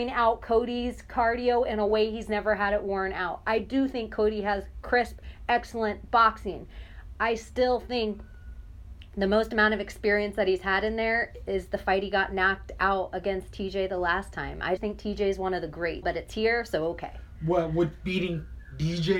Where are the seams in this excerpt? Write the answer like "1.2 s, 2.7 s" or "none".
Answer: 14.8 s, 16.0 s